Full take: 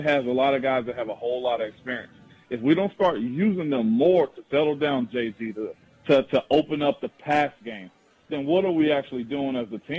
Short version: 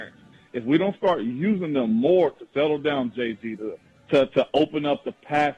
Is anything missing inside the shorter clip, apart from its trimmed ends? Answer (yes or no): no